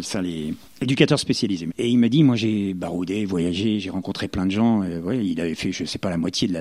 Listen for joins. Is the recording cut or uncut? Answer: uncut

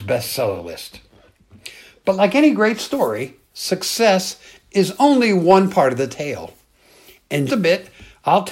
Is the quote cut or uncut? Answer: cut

